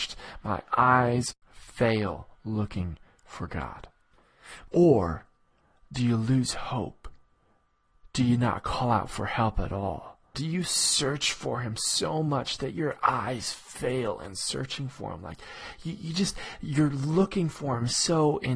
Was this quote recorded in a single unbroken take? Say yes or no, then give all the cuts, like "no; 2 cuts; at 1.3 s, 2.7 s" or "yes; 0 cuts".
no; 3 cuts; at 1.4 s, 4.7 s, 10.3 s